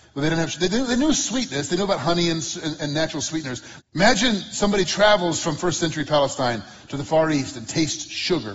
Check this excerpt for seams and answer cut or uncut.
cut